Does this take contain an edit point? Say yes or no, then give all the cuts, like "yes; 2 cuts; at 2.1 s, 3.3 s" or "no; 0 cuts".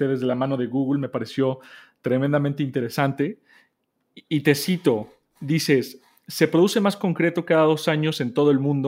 no; 0 cuts